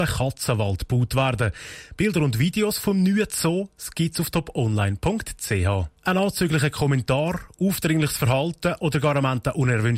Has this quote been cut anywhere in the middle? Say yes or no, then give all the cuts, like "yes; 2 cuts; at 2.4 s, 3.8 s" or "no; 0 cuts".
yes; 1 cut; at 6.0 s